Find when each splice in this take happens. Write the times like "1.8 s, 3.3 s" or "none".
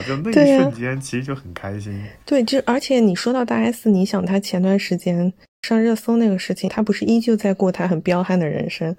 6.7 s